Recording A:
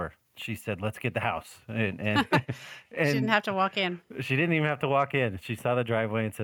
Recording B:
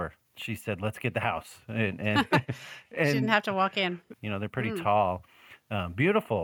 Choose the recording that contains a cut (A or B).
B